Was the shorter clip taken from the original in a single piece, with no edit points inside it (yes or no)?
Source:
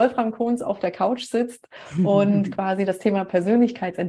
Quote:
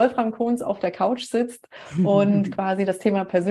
yes